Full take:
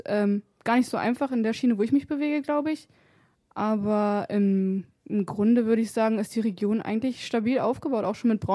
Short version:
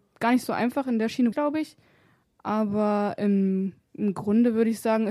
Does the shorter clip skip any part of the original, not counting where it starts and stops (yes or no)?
yes